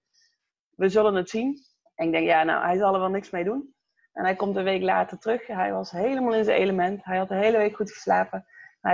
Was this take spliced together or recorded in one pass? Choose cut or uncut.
cut